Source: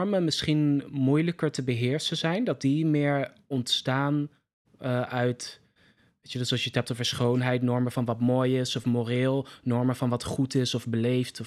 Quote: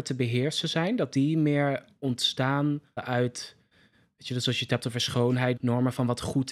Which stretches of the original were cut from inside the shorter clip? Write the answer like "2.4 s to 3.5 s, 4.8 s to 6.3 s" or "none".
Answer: 4.4 s to 5.0 s, 7.6 s to 9.6 s